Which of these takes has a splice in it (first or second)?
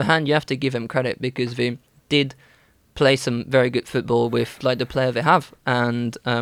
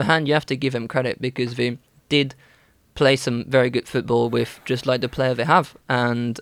first